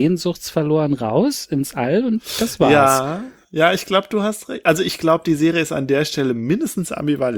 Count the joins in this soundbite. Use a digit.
0